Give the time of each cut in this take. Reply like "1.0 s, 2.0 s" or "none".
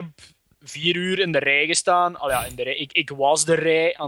none